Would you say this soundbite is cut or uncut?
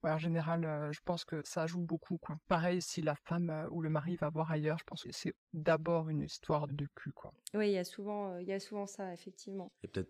uncut